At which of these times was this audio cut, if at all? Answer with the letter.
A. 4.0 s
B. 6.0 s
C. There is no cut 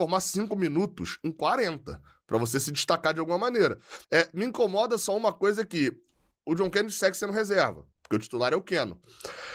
A